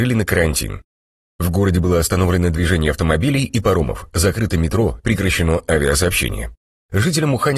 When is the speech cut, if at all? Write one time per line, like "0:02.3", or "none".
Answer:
0:05.0